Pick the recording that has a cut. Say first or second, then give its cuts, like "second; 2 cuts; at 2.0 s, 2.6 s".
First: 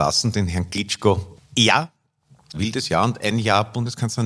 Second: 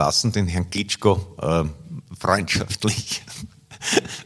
first; 2 cuts; at 1.4 s, 2.5 s